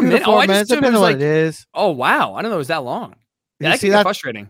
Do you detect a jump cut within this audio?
yes; 1 cut; at 1.7 s

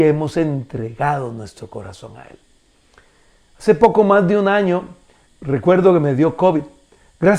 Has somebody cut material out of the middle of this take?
yes; 1 cut; at 5.2 s

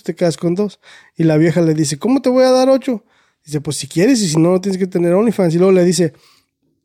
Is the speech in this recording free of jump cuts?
yes; 0 cuts

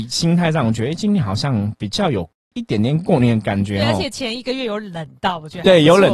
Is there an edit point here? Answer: no; 0 cuts

